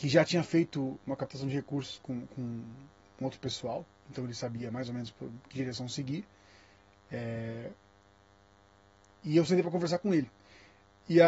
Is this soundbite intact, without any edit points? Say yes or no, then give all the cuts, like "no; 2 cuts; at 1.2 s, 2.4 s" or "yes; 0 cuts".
yes; 0 cuts